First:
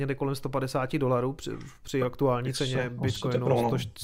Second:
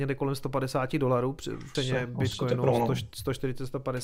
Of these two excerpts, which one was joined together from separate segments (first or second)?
second